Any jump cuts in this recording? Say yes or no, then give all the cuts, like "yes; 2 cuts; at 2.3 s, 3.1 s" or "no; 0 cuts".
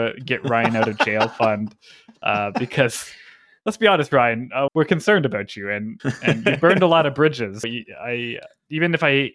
yes; 2 cuts; at 4.7 s, 7.6 s